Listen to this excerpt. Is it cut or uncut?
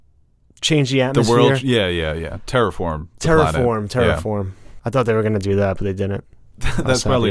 uncut